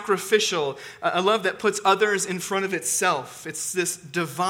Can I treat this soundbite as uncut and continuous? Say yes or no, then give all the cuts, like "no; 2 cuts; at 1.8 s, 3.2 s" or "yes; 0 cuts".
yes; 0 cuts